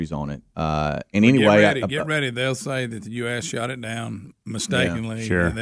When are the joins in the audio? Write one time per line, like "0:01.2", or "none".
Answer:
none